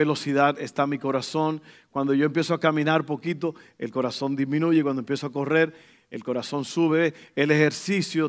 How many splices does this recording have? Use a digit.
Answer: 0